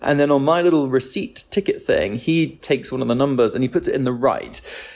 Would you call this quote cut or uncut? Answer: uncut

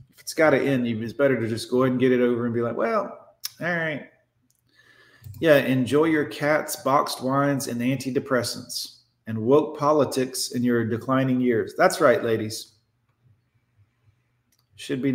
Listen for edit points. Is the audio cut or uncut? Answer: uncut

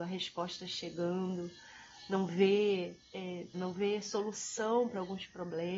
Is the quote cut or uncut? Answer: cut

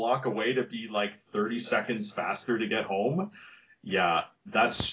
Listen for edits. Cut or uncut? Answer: uncut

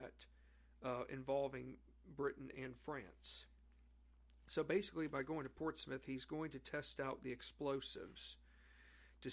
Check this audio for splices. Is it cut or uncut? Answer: uncut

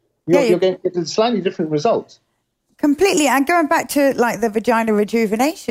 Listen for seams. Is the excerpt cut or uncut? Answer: uncut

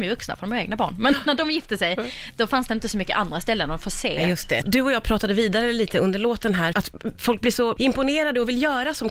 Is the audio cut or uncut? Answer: cut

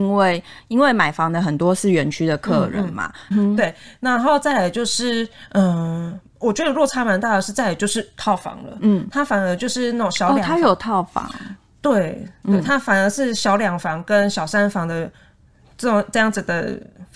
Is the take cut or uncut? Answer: cut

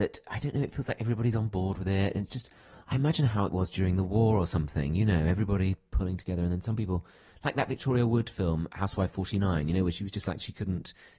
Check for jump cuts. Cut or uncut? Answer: uncut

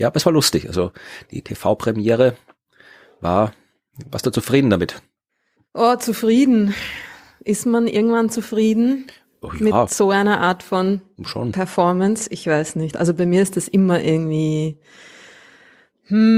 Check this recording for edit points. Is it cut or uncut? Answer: uncut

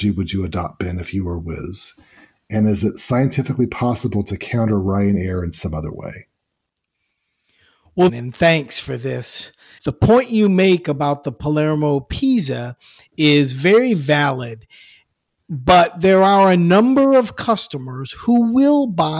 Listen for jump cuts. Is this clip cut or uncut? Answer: cut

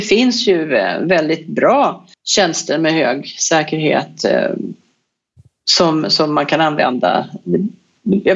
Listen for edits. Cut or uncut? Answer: cut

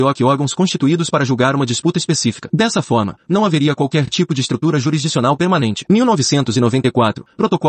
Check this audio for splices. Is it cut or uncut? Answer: uncut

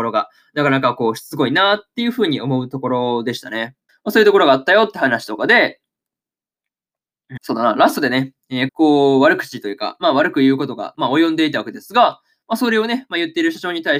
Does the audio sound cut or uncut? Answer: cut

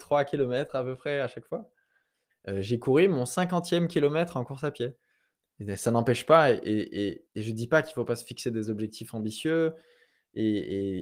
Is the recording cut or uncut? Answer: cut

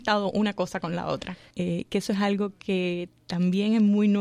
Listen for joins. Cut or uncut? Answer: cut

